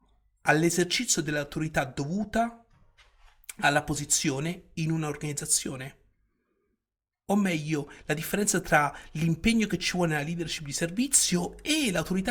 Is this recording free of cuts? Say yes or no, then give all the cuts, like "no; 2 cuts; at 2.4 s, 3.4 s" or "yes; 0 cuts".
yes; 0 cuts